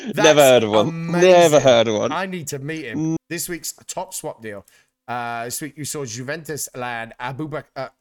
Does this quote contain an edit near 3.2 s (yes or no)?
yes